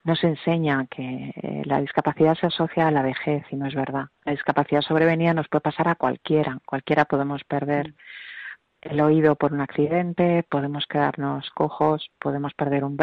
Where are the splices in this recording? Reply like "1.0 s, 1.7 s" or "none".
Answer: 4.2 s